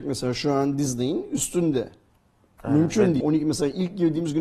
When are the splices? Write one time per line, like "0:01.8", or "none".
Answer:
0:03.2